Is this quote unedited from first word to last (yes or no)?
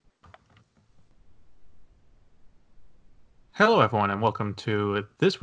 yes